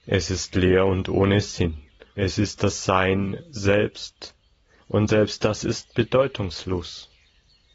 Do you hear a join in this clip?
no; 0 cuts

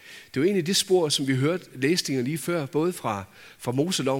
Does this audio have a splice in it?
no; 0 cuts

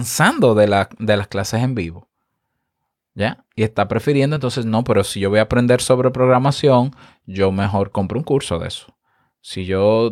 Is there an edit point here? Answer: no; 0 cuts

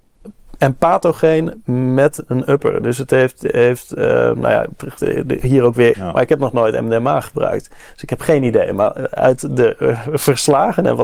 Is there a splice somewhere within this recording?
yes; 1 cut; at 5.9 s

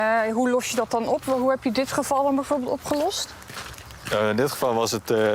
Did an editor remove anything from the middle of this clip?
no; 0 cuts

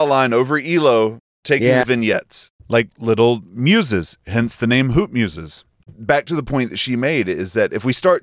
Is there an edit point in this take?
yes; 1 cut; at 1.8 s

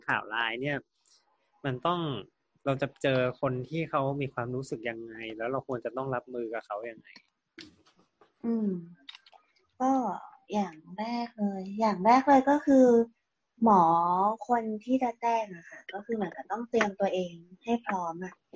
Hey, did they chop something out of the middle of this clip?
no; 0 cuts

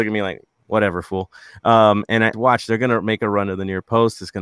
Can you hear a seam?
yes; 1 cut; at 2.3 s

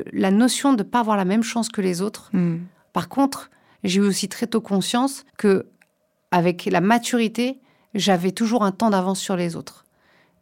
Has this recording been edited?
yes; 2 cuts; at 2.9 s, 5.3 s

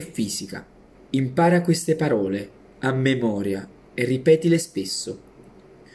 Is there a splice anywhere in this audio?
yes; 1 cut; at 0.9 s

